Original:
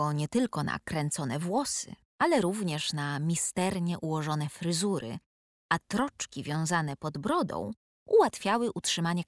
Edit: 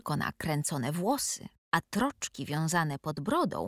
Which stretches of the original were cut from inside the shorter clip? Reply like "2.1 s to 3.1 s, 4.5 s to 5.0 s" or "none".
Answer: 2.1 s to 5.6 s